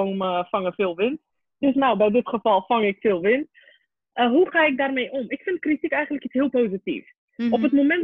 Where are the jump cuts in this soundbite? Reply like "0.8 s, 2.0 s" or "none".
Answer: none